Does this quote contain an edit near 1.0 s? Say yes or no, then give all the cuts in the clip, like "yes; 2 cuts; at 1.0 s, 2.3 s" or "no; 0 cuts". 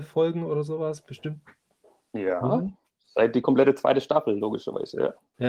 no; 0 cuts